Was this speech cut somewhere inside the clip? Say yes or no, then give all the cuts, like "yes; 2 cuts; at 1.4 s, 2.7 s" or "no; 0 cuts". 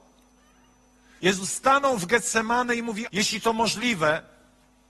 yes; 2 cuts; at 1.2 s, 3.1 s